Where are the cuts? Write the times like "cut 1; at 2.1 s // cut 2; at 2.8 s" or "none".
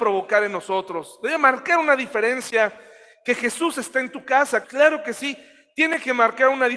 cut 1; at 4.6 s